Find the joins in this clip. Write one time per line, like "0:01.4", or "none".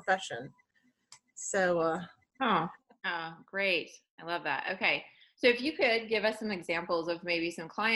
0:02.8